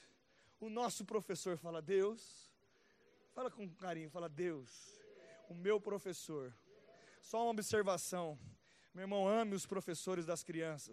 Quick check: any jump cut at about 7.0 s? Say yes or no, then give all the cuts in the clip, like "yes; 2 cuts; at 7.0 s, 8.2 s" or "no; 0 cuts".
no; 0 cuts